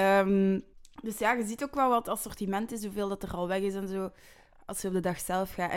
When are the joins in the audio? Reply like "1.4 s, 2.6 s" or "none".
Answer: none